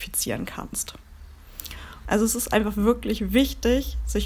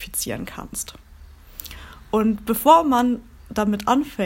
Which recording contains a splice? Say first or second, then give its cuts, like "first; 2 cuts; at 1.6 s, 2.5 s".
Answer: first; 1 cut; at 2.0 s